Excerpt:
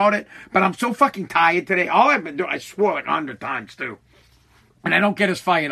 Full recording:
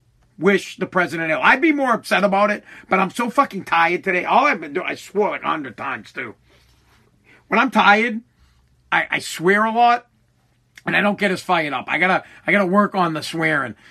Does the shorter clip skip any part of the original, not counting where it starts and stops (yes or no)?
yes